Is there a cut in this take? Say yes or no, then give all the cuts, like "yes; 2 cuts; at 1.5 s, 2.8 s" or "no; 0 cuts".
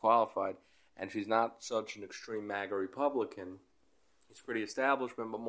no; 0 cuts